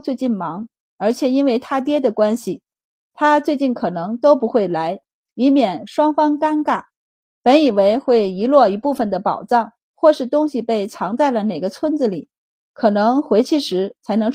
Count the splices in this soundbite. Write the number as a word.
two